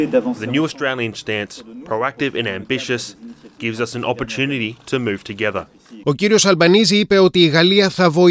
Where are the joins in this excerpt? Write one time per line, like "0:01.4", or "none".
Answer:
0:06.0